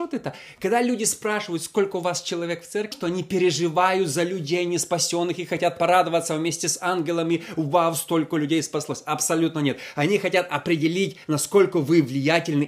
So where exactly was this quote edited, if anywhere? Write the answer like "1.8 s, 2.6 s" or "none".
2.9 s